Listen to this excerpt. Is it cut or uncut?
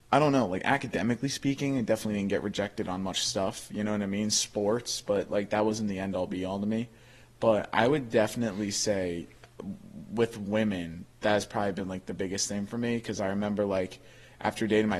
uncut